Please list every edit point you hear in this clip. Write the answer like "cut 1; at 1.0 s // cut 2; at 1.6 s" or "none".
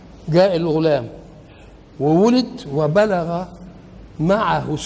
none